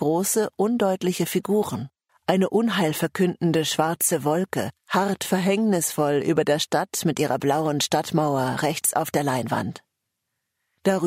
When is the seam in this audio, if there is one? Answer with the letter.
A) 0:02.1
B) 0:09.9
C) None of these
A